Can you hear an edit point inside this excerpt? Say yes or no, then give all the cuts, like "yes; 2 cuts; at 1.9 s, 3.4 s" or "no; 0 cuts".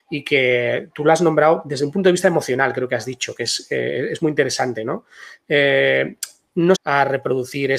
yes; 1 cut; at 6.7 s